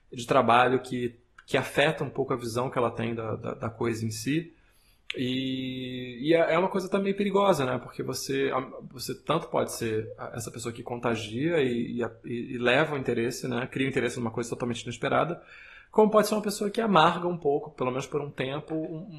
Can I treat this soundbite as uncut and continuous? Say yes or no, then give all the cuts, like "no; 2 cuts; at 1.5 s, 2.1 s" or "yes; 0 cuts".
yes; 0 cuts